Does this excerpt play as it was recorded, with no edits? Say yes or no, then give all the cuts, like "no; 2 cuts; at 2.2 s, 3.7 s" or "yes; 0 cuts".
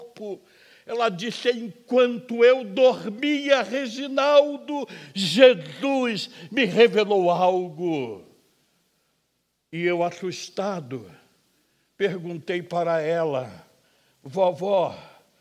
yes; 0 cuts